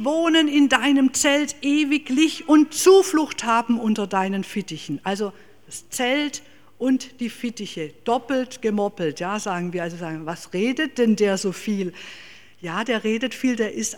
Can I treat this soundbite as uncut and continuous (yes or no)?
yes